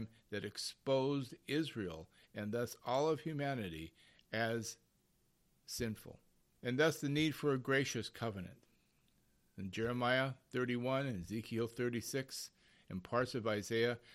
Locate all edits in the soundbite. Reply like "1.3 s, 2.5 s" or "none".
6.5 s